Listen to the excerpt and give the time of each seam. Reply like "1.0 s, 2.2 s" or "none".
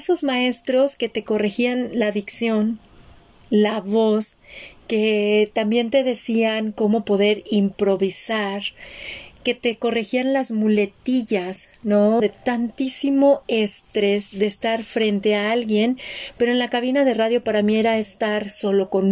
12.2 s